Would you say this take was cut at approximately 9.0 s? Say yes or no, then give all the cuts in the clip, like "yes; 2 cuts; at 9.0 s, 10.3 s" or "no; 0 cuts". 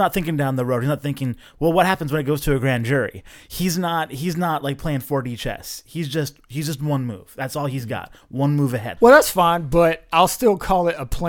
yes; 1 cut; at 9.0 s